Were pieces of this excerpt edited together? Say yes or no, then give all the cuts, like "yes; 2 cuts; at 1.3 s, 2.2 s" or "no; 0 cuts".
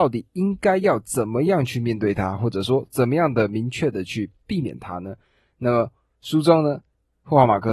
no; 0 cuts